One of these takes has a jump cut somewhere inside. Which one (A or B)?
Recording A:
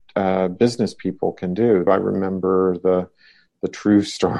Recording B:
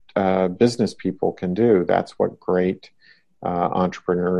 A